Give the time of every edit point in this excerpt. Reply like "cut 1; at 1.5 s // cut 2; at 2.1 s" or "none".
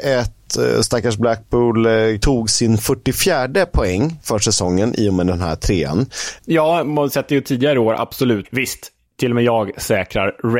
cut 1; at 2.2 s // cut 2; at 6.4 s // cut 3; at 8.4 s